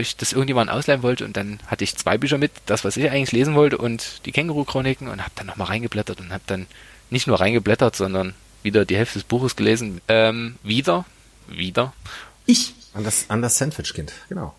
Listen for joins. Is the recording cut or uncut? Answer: cut